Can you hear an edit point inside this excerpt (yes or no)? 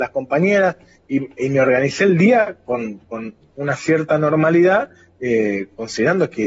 no